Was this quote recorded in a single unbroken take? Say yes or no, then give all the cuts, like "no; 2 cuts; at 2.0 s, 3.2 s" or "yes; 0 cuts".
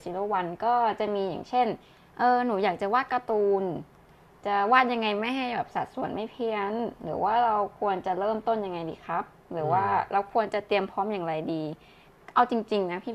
yes; 0 cuts